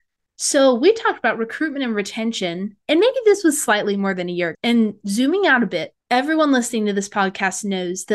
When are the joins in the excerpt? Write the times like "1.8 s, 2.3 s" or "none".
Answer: 4.5 s, 6.0 s